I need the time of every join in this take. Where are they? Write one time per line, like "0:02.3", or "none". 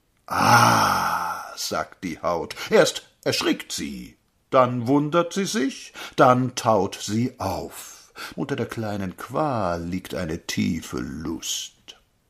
0:08.3